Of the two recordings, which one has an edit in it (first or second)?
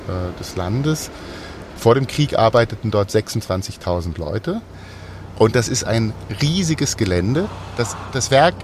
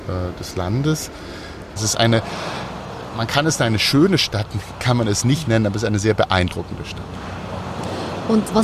second